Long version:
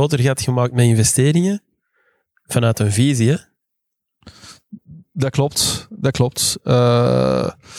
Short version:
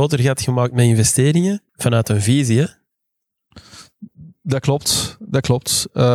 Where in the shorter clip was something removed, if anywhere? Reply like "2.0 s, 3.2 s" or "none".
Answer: 1.7 s